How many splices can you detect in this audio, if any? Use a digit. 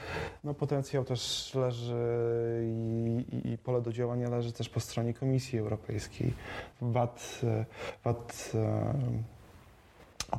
2